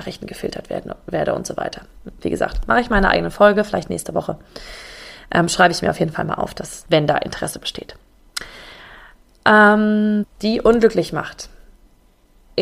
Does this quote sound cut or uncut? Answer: cut